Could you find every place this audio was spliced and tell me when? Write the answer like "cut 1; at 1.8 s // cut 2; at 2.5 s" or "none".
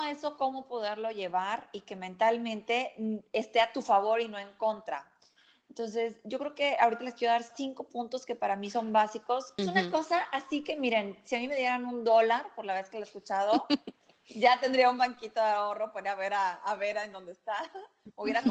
cut 1; at 9.6 s